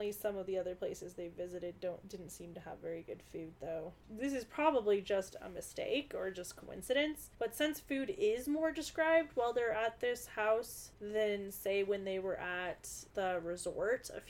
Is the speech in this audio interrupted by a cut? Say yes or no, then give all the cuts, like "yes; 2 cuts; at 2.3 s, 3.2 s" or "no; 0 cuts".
no; 0 cuts